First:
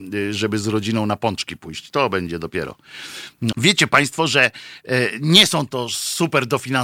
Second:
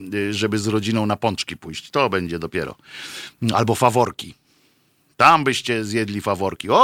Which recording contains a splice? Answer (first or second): first